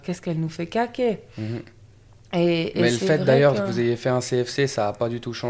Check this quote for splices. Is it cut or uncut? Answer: uncut